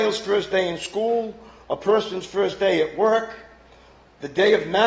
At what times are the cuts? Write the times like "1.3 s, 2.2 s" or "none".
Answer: none